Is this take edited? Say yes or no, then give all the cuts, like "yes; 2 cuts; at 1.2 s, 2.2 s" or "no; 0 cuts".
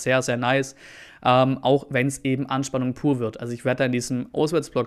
no; 0 cuts